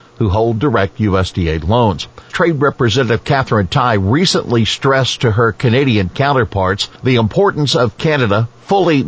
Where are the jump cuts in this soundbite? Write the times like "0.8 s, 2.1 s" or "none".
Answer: 2.3 s, 7.0 s